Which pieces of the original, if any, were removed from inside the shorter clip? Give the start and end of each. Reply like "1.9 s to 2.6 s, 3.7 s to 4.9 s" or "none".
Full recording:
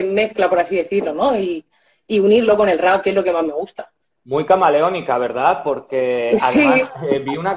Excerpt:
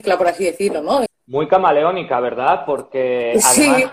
1.4 s to 4.0 s